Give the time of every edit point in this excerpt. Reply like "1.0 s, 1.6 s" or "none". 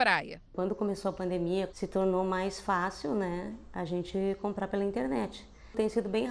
1.7 s